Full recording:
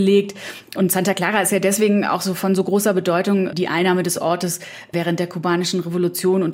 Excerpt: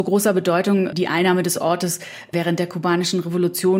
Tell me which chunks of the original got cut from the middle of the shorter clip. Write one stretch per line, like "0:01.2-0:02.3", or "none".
none